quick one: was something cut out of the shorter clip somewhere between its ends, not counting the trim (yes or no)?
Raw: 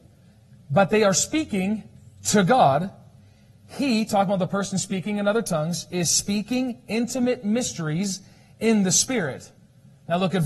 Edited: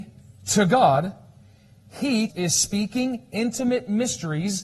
yes